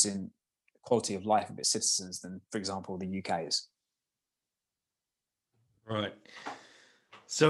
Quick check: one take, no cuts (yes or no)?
yes